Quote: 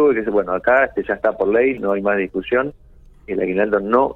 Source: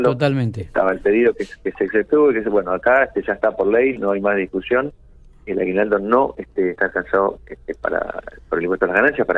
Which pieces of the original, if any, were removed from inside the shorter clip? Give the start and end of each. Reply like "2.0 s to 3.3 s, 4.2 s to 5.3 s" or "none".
none